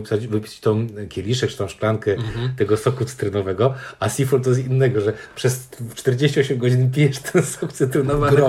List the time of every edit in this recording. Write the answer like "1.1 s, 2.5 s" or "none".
none